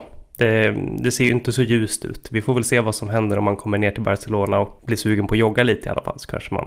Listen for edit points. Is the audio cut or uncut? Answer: cut